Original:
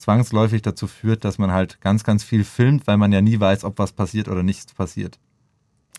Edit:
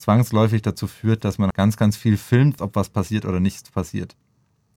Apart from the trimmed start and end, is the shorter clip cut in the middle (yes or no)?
yes